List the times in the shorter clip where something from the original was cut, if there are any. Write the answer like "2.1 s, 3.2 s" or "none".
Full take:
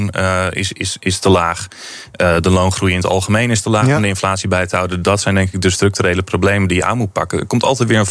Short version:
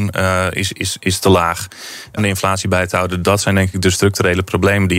2.2 s

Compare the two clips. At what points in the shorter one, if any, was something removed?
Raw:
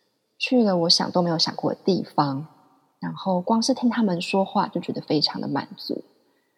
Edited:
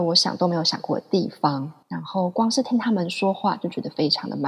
1.8 s

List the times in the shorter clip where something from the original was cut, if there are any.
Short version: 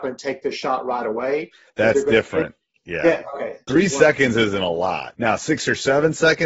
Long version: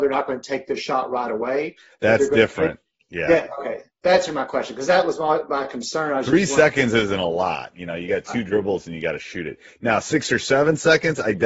3.7 s, 5.1 s

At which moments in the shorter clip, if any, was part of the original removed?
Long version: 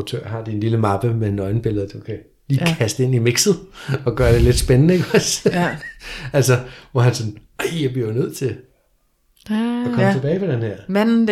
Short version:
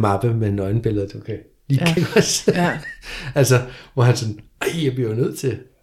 2.0 s

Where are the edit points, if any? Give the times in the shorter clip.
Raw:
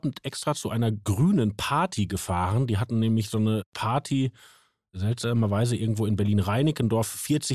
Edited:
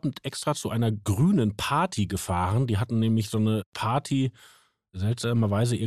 none

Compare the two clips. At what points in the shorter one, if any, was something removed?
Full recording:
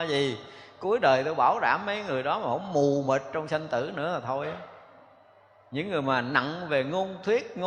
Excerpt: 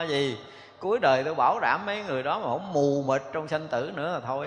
none

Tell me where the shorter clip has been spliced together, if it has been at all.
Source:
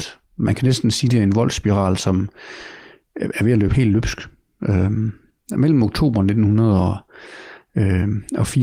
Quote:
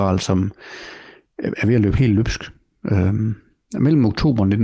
none

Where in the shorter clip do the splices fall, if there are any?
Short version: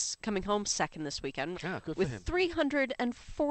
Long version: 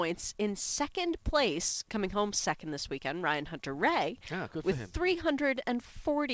1.5 s

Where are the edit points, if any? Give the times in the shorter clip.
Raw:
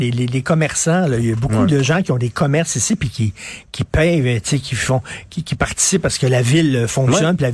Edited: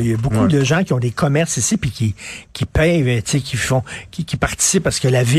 none

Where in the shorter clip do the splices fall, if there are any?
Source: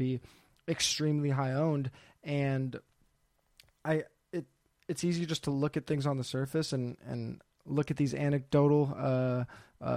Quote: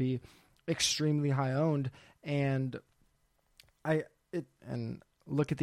4.6 s

